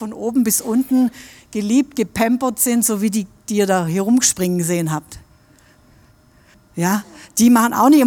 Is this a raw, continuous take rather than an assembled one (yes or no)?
no